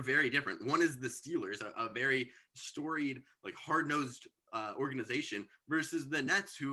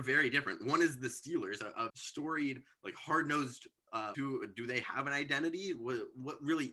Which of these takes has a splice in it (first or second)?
second